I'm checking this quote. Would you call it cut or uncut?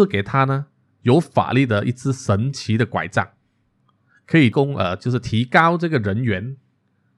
cut